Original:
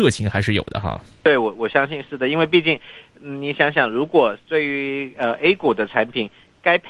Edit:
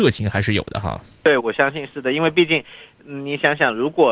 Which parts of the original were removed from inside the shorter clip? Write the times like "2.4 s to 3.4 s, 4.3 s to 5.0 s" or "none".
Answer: 1.4 s to 1.6 s